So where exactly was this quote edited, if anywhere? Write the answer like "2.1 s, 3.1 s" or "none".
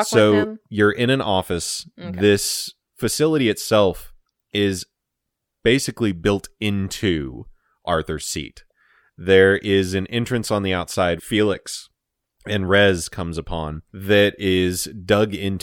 11.2 s, 13.9 s